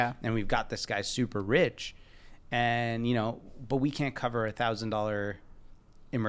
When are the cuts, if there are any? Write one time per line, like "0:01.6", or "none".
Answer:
none

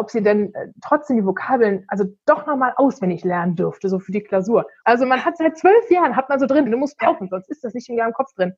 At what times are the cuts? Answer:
0:04.8
0:06.7

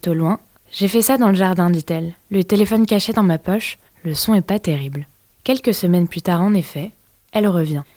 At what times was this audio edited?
0:05.2

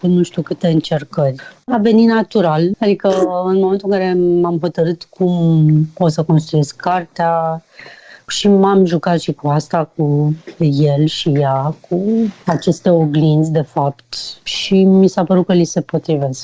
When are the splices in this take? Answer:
none

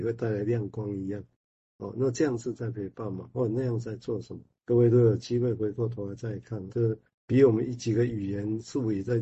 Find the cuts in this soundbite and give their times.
0:04.6
0:06.7

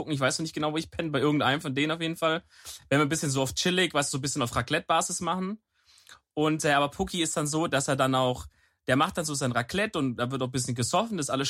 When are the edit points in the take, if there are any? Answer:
none

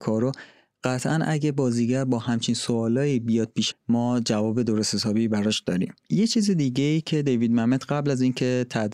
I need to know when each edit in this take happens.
0:03.7
0:06.0

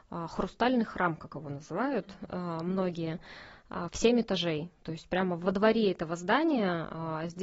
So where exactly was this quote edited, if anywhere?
none

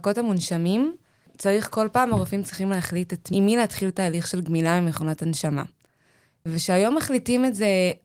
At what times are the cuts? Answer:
0:03.3

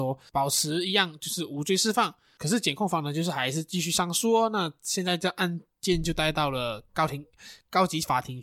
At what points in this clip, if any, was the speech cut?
0:02.4

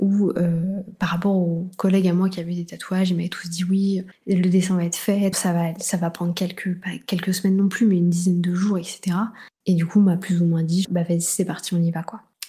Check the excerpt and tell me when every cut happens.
0:05.3
0:09.6
0:10.8

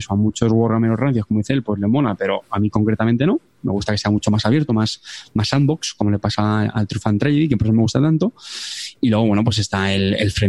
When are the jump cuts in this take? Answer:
none

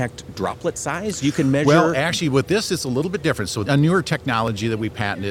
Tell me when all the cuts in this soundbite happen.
0:03.7

